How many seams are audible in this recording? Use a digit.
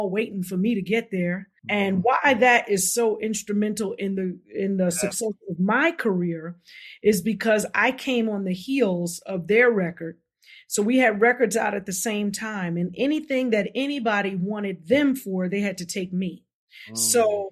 1